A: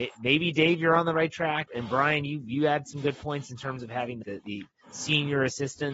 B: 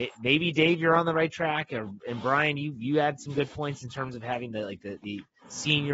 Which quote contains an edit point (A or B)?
A